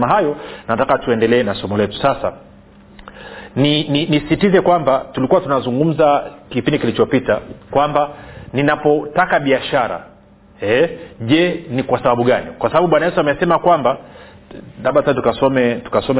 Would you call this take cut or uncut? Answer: uncut